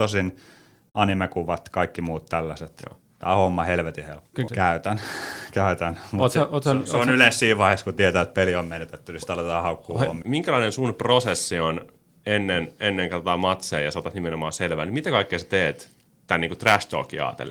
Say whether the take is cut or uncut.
cut